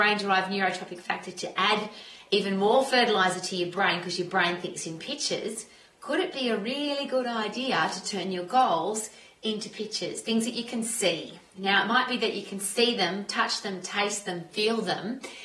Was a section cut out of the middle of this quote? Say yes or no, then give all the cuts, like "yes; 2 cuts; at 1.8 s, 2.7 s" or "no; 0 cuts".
no; 0 cuts